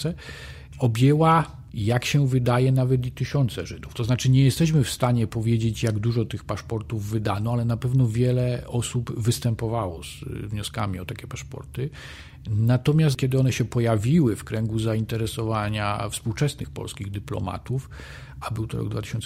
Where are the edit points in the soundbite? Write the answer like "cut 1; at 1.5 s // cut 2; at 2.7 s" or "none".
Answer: none